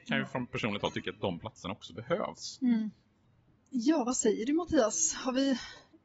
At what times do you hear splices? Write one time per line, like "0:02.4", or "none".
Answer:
none